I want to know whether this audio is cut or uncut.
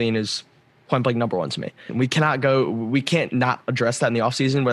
cut